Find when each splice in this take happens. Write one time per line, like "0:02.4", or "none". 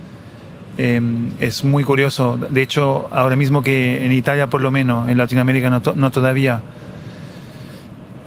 none